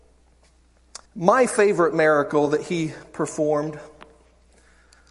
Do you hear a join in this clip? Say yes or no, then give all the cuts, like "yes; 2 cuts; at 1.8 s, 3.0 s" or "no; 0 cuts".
yes; 1 cut; at 1.1 s